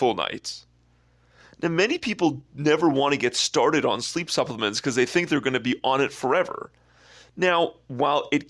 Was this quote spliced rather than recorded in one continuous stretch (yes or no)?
no